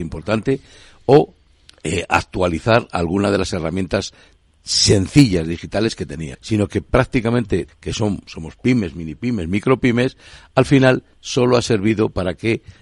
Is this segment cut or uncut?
cut